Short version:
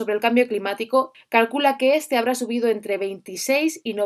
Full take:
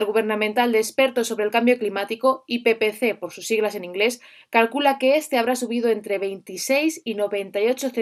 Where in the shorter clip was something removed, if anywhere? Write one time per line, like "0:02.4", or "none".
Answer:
0:01.1